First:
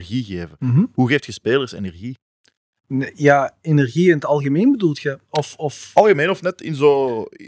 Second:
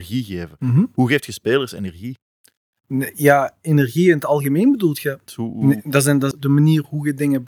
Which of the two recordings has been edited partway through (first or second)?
second